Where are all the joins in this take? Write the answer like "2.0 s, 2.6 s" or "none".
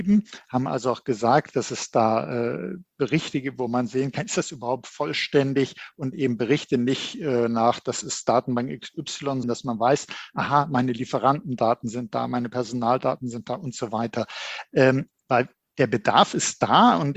9.4 s